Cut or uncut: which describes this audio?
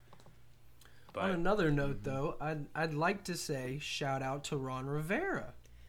uncut